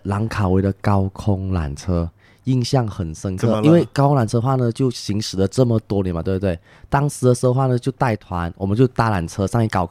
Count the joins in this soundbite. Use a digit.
0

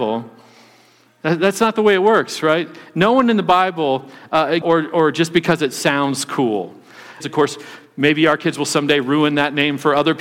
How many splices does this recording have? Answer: 2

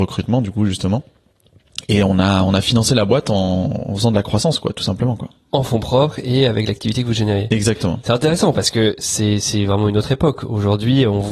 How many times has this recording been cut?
0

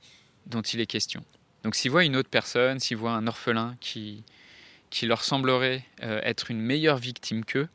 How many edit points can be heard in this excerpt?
1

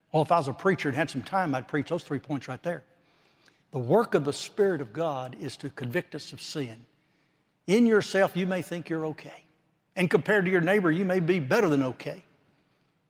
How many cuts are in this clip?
0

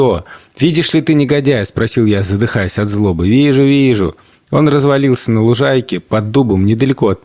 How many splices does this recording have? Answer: 0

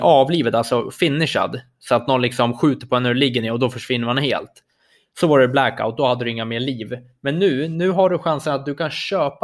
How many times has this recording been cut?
0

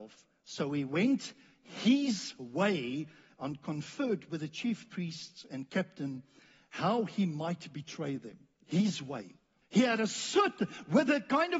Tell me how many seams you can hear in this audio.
1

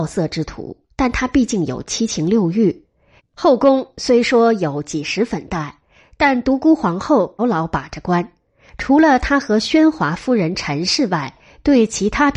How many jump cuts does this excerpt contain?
2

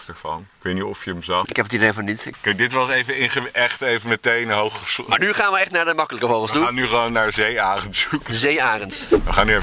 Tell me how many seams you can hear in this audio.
0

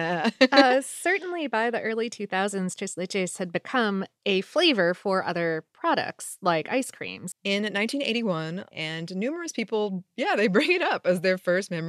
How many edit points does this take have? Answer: 2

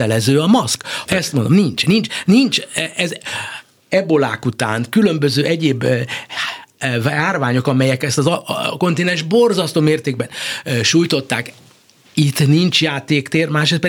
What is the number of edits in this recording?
1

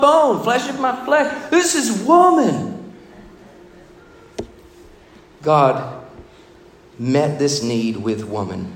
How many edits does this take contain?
0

